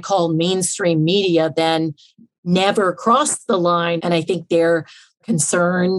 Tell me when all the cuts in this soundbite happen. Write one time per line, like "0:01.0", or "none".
0:04.0